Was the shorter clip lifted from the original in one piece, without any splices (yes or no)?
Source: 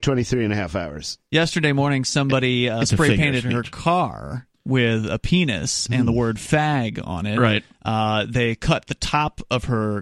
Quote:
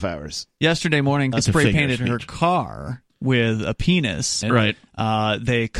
no